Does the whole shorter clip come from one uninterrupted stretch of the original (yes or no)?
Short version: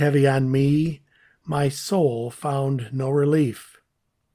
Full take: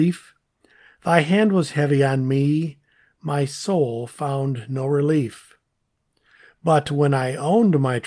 yes